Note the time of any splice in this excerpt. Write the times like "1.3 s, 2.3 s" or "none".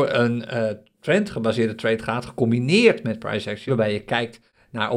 3.7 s